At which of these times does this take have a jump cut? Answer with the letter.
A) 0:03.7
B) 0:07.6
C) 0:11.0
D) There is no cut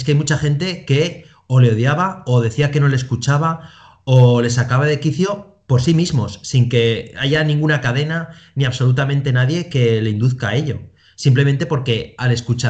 D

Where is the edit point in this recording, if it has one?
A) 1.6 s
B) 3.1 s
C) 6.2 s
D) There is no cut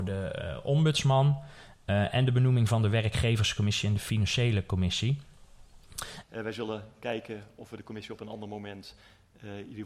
C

